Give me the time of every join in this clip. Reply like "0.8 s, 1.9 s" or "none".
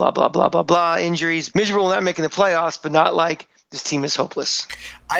1.5 s